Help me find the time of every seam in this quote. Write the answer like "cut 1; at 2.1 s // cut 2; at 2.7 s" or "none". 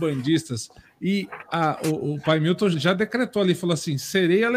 cut 1; at 2.7 s